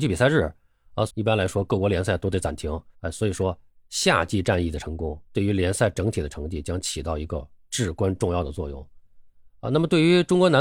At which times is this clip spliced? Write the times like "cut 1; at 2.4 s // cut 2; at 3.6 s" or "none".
cut 1; at 1.1 s // cut 2; at 2.9 s // cut 3; at 5.3 s